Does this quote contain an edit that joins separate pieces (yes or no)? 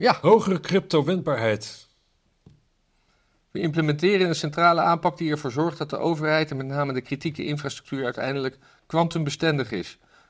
no